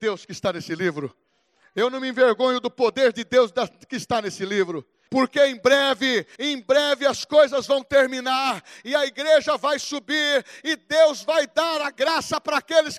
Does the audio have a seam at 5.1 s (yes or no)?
yes